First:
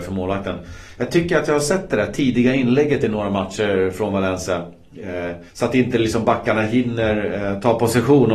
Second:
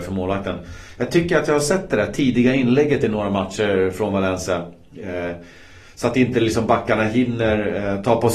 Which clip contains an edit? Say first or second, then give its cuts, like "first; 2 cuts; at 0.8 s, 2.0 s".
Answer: first; 1 cut; at 5.5 s